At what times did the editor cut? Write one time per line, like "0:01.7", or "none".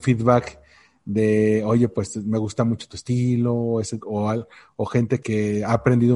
0:04.0
0:05.2

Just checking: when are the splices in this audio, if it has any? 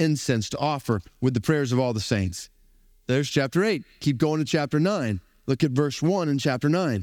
none

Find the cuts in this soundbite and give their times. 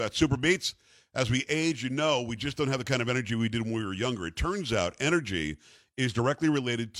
none

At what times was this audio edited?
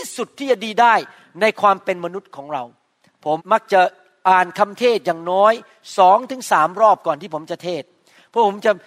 0:03.4

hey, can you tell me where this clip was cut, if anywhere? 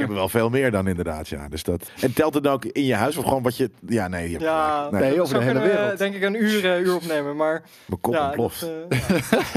0:01.9

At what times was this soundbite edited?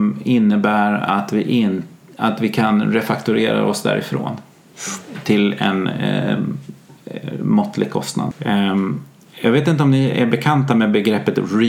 0:08.3

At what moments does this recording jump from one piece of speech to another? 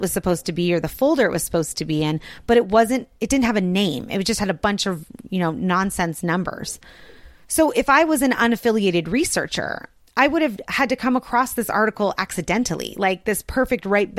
none

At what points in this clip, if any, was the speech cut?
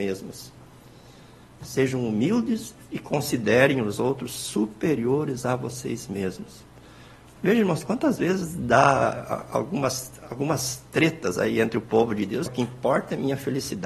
0:07.4
0:12.5

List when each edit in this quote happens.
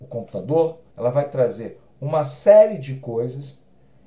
0:00.9

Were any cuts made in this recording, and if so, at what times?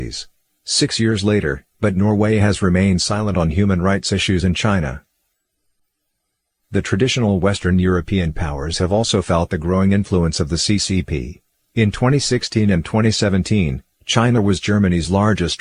0:01.7
0:11.6

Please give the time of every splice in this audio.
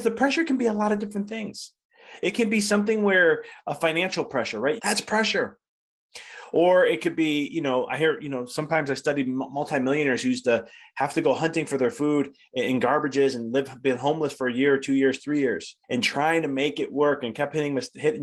0:04.8
0:15.8

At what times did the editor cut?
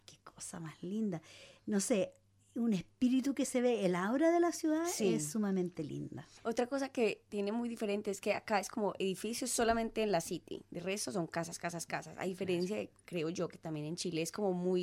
none

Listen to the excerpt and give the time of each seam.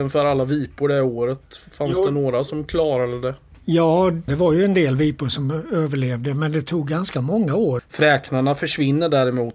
0:04.3
0:07.8

